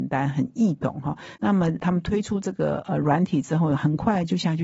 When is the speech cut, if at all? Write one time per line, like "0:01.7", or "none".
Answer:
0:01.4